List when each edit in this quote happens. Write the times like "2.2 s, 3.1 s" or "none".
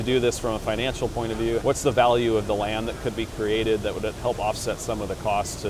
1.6 s